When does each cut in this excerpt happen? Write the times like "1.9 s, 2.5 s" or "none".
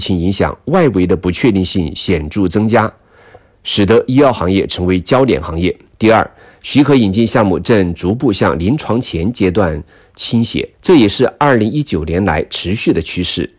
5.9 s, 10.7 s